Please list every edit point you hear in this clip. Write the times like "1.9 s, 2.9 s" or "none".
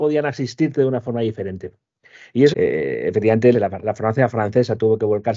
2.5 s, 3.5 s